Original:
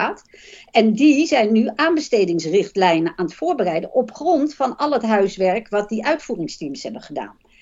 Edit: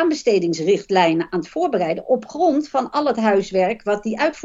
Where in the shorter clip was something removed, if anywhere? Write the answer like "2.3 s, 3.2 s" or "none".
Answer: none